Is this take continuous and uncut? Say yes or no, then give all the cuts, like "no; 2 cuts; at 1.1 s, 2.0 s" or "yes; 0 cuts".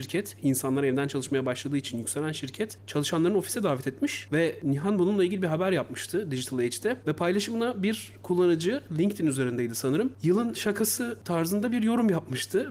yes; 0 cuts